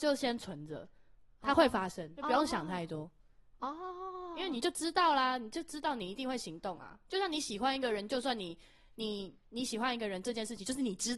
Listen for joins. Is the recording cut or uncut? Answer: cut